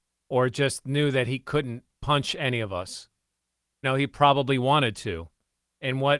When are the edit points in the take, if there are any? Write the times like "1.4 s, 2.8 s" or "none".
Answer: 3.8 s